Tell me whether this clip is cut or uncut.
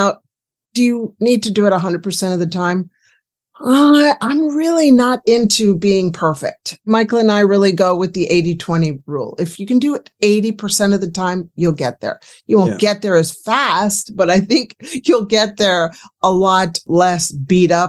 uncut